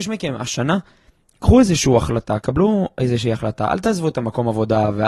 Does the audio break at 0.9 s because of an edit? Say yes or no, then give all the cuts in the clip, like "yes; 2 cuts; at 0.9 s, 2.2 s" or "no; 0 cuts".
no; 1 cut; at 2.4 s